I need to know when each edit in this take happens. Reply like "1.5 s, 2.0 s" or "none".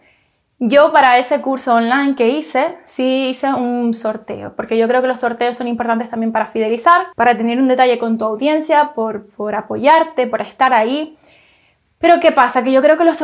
7.1 s